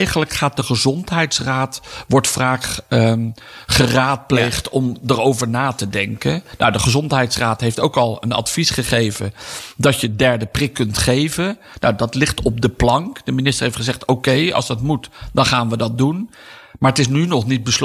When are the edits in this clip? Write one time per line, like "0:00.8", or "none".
none